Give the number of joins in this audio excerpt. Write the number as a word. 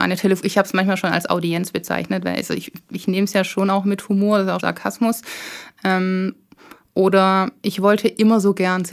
one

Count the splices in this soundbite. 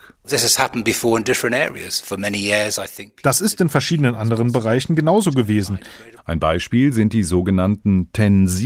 one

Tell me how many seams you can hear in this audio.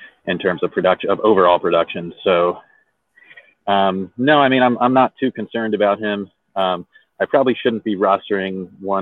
zero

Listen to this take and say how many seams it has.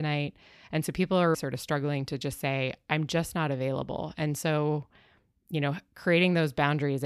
one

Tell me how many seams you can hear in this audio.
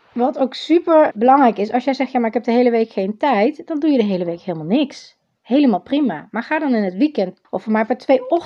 two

